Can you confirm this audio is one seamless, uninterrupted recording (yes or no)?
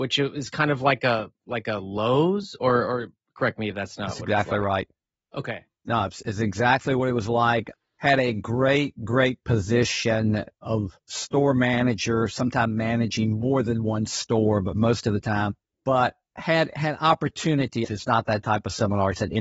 no